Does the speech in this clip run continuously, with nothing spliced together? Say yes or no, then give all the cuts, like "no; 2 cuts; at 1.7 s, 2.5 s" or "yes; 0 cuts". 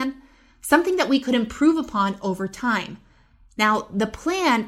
yes; 0 cuts